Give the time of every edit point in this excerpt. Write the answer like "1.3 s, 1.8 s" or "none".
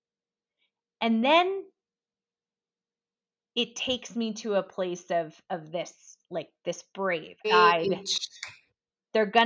7.4 s